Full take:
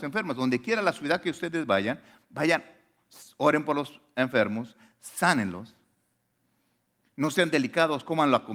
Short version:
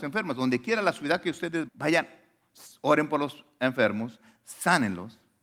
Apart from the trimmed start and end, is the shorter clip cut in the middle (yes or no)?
yes